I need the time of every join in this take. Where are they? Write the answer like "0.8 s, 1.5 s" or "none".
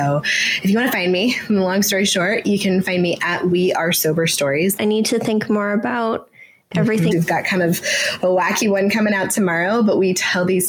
4.8 s, 7.1 s